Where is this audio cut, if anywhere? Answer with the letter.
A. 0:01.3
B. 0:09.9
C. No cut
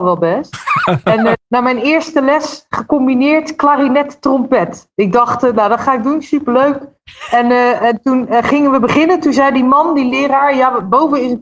A